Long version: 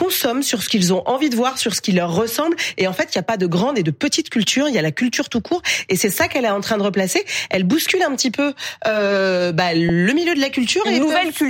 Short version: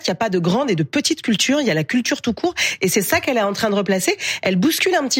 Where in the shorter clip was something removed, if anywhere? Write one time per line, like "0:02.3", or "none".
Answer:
none